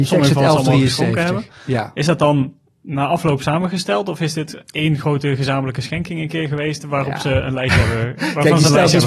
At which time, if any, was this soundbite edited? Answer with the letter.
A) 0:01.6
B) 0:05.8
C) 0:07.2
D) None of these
D